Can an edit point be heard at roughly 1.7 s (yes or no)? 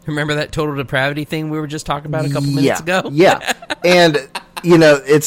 no